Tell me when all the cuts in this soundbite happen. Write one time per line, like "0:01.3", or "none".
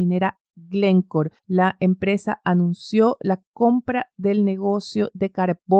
0:01.4

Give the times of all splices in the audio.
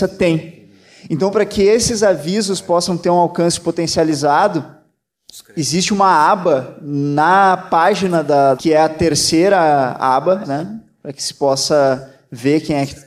0:08.6
0:10.4

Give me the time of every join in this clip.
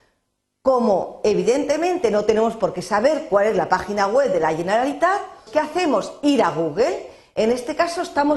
0:05.5

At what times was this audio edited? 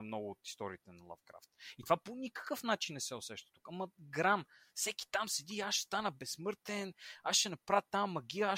none

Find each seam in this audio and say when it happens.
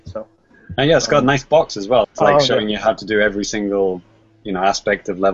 0:02.0

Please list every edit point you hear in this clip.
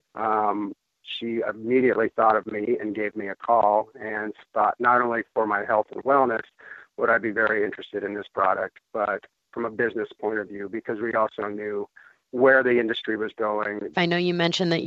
0:13.9

